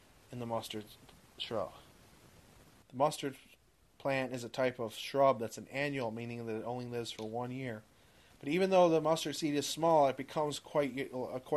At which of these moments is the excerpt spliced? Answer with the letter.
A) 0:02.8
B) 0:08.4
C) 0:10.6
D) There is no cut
A